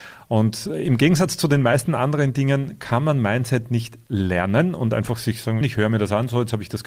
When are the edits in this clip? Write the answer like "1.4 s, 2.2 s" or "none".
5.6 s